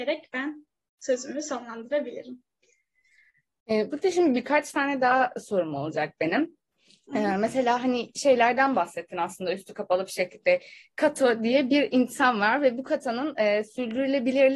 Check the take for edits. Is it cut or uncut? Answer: uncut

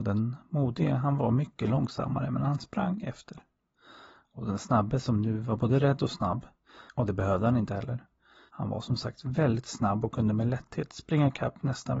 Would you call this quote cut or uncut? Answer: cut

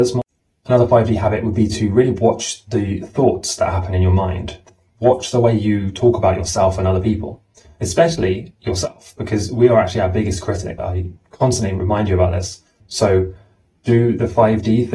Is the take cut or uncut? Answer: cut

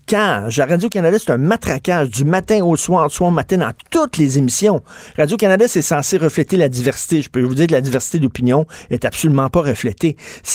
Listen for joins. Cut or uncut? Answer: uncut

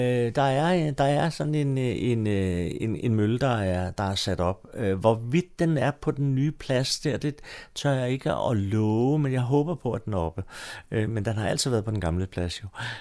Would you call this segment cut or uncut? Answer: cut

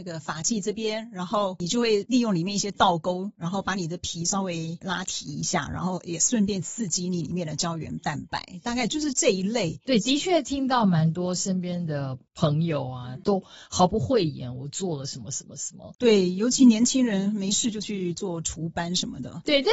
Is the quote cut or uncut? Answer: uncut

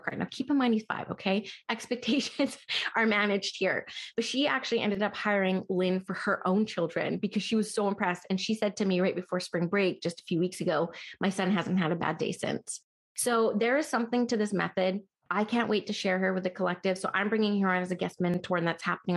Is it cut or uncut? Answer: uncut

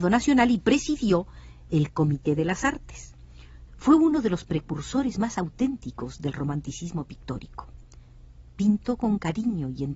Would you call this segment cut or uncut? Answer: cut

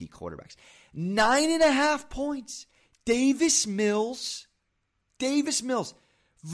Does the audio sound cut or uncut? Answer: uncut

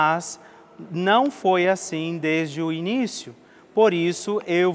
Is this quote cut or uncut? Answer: uncut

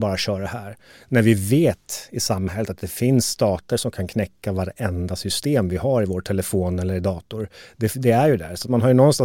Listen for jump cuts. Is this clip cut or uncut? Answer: uncut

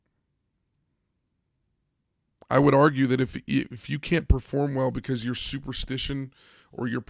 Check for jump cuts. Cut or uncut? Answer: uncut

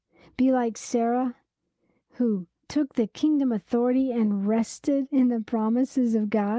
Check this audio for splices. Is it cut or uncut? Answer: cut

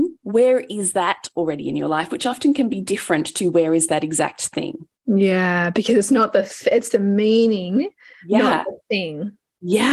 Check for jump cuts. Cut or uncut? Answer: cut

